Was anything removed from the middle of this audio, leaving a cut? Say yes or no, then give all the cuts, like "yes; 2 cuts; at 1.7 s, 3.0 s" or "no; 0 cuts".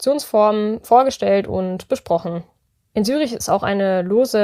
yes; 1 cut; at 2.9 s